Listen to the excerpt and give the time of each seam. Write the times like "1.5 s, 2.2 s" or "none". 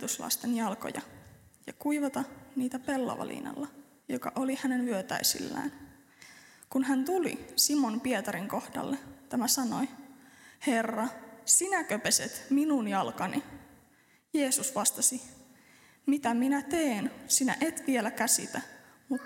none